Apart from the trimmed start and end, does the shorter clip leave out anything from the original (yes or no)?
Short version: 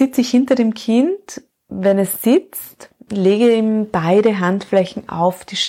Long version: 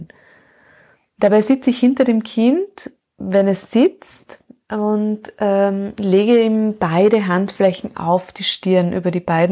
yes